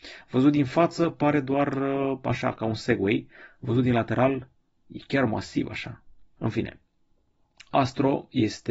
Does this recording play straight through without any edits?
no; 1 cut; at 6.4 s

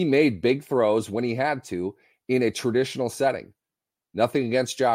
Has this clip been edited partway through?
no; 0 cuts

